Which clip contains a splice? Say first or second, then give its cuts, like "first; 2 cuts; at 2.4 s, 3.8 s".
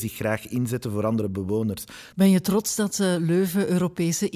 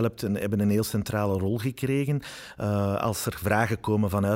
first; 1 cut; at 2.1 s